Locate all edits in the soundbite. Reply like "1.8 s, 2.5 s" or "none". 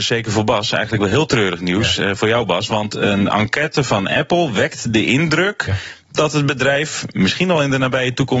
none